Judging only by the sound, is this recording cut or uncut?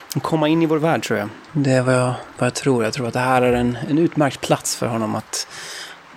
cut